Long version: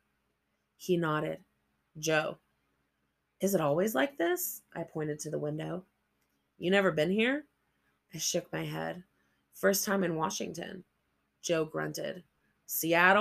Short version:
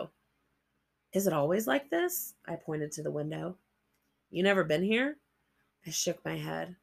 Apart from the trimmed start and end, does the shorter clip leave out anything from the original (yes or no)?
no